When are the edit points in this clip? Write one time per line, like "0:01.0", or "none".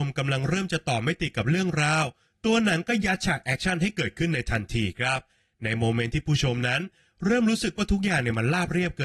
none